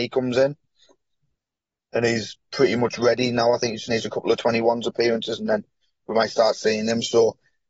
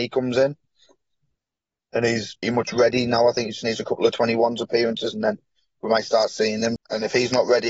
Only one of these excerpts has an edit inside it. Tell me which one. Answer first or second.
second